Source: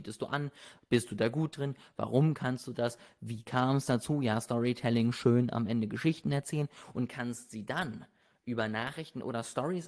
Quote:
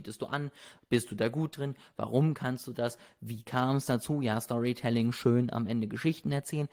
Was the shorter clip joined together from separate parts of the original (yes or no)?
no